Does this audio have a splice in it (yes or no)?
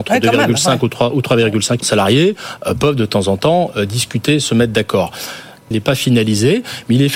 yes